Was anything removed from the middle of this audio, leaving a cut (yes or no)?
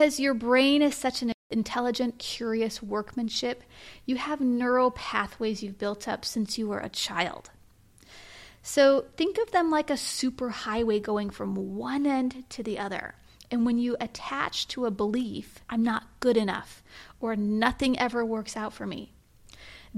yes